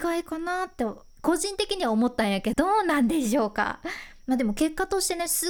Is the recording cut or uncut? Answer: cut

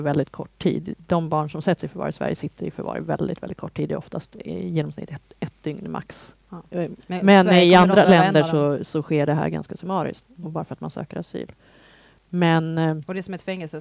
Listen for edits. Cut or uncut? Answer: cut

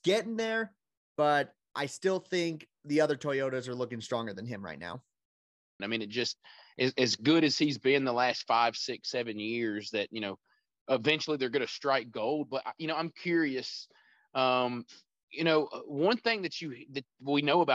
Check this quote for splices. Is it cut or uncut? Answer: cut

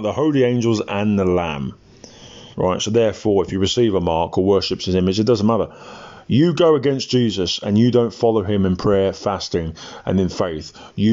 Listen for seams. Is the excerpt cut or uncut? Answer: cut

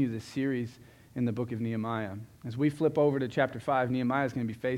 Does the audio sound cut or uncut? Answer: uncut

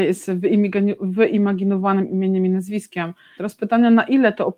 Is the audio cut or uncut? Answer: cut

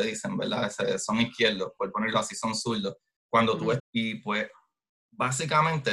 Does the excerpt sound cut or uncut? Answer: cut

